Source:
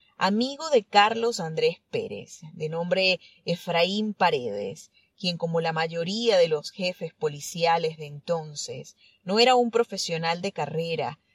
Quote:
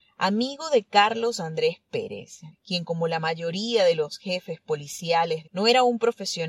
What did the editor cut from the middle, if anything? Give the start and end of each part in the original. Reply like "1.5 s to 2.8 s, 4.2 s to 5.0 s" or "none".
2.5 s to 5.0 s, 8.0 s to 9.2 s